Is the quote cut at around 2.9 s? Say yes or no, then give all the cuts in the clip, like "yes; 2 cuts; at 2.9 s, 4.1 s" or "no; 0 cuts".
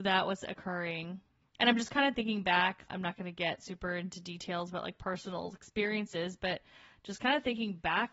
yes; 2 cuts; at 1.4 s, 2.9 s